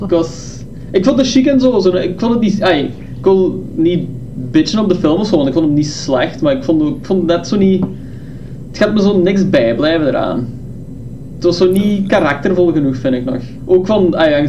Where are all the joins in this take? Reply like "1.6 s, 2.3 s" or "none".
13.6 s